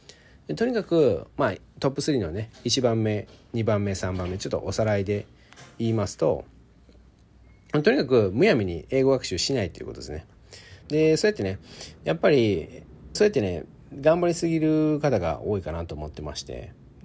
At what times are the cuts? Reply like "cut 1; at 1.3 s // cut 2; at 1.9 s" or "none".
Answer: cut 1; at 10.8 s // cut 2; at 13.2 s